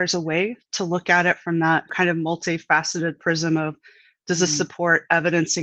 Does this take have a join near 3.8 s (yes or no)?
no